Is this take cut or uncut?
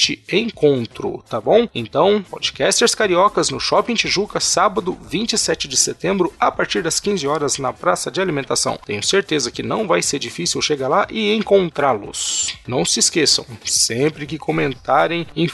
cut